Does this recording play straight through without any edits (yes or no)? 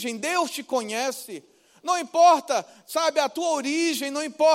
yes